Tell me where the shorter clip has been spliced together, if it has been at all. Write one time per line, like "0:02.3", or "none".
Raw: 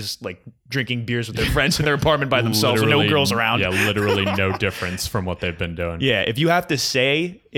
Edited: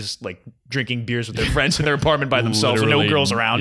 none